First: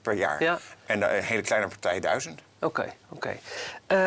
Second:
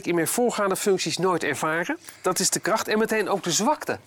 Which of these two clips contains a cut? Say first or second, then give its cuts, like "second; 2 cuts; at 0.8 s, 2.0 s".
first; 1 cut; at 3.0 s